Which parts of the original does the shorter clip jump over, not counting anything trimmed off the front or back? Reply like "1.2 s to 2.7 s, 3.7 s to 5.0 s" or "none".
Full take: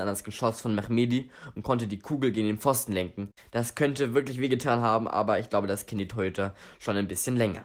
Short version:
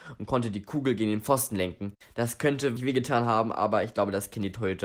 4.1 s to 4.3 s